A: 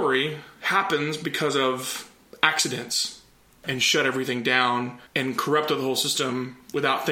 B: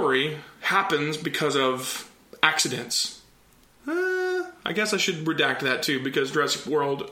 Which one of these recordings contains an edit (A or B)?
A